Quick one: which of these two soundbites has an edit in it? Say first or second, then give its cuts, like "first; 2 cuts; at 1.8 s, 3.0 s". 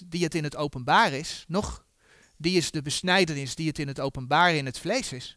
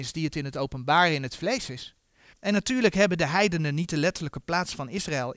second; 1 cut; at 2.3 s